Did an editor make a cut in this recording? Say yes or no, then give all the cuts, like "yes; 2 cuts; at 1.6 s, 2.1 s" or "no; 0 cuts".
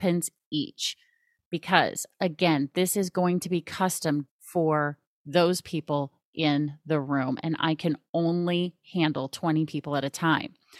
yes; 1 cut; at 4.3 s